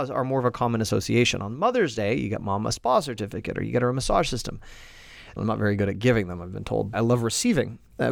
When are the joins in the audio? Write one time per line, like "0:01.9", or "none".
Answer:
0:05.4
0:06.9